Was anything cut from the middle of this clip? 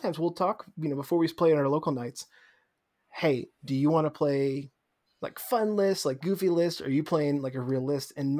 no; 0 cuts

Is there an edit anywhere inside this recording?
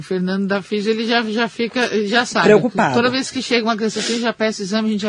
no; 0 cuts

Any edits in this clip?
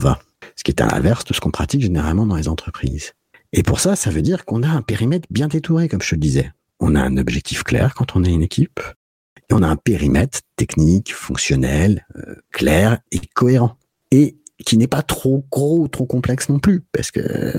no; 0 cuts

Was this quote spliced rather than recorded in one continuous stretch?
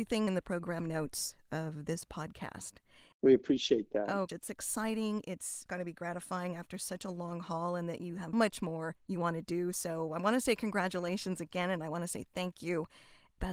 yes; 2 cuts; at 4.3 s, 8.3 s

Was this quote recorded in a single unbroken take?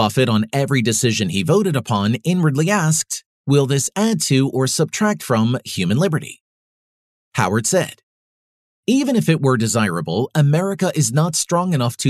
yes; 0 cuts

